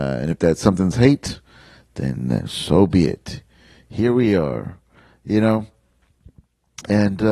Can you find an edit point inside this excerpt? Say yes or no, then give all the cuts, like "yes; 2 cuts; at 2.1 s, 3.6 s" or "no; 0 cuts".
no; 0 cuts